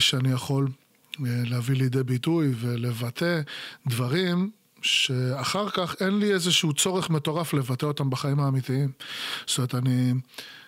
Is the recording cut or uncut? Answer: uncut